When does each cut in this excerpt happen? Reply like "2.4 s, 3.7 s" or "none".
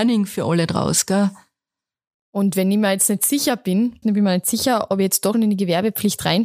4.0 s, 5.3 s